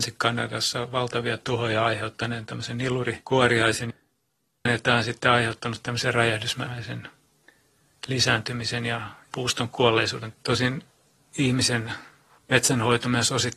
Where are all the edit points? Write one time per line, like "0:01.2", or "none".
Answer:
0:04.7